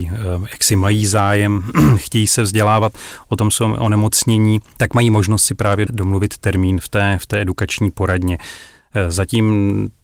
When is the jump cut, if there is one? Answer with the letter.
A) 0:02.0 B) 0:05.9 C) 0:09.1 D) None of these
B